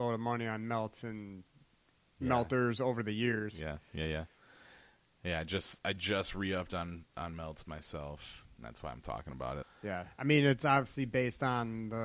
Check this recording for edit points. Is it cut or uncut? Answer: cut